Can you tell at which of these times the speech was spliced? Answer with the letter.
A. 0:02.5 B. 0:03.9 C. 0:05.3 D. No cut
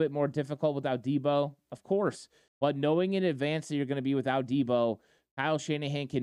A